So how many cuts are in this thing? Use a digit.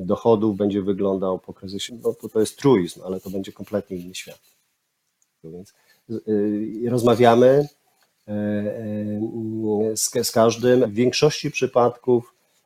3